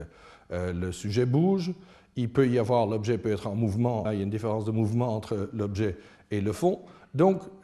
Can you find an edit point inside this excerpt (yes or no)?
yes